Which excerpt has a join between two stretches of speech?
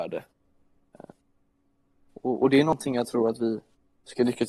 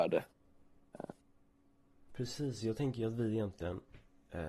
second; 1 cut; at 2.1 s

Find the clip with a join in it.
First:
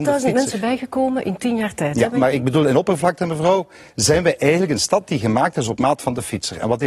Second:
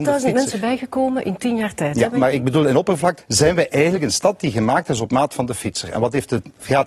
second; 1 cut; at 3.2 s

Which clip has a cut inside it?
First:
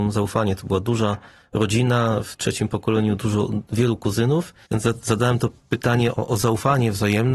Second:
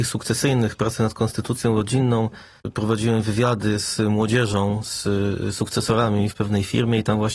first; 2 cuts; at 4.7 s, 6.1 s

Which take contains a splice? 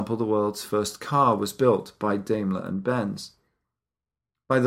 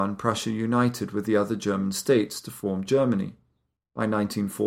second; 1 cut; at 3.8 s

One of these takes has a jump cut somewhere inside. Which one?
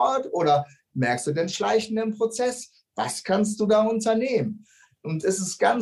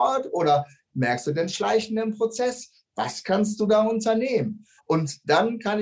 second; 1 cut; at 4.8 s

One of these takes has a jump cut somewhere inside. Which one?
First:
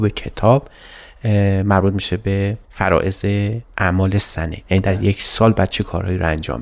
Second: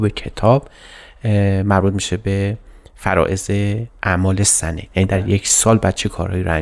first; 1 cut; at 2.6 s

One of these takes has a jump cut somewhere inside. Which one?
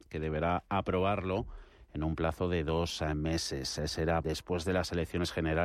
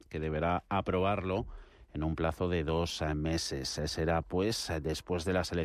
first; 1 cut; at 4.2 s

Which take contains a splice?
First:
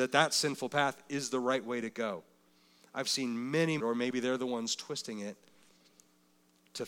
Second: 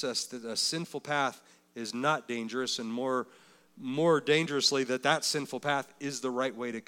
first; 1 cut; at 3.8 s

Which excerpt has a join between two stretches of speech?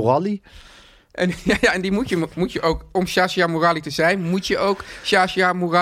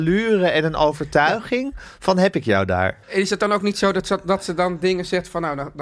second; 1 cut; at 3.0 s

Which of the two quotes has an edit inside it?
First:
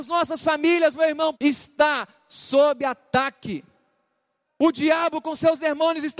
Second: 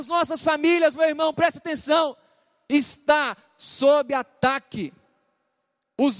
first; 2 cuts; at 1.3 s, 4.4 s

